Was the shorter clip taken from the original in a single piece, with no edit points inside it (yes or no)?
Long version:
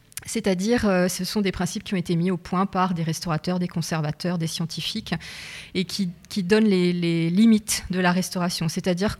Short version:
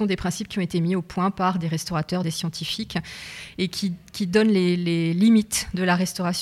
no